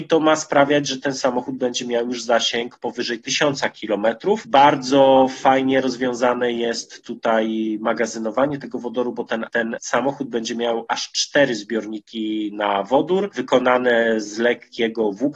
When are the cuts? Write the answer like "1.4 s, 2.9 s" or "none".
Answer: 4.4 s, 9.5 s